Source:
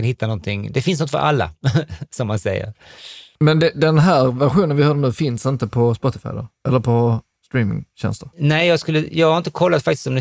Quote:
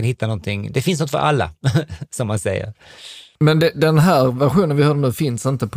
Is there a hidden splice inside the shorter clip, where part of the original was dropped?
no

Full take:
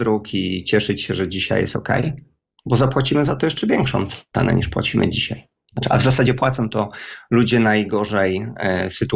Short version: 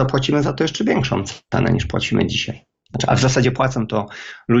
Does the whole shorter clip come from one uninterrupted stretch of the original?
yes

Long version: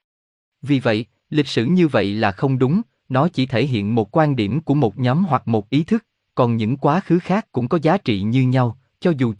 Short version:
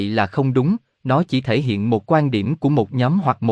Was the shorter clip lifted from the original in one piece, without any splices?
yes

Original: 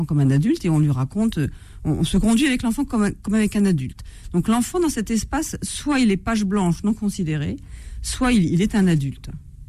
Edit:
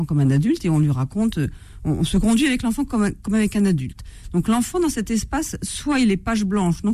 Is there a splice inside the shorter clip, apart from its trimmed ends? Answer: no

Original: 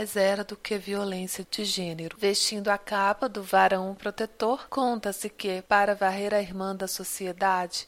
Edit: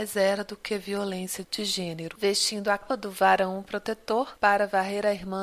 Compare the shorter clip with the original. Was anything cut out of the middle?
yes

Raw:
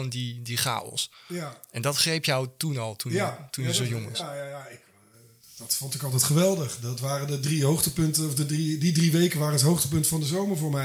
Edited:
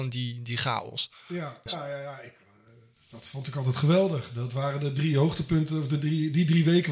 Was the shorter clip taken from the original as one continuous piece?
no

